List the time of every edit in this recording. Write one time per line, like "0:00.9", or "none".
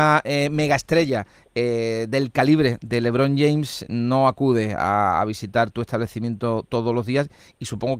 none